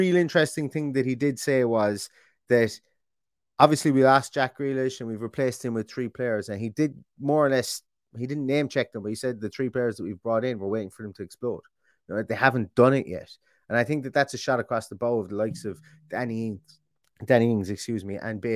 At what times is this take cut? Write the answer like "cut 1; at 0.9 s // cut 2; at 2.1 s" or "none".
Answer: none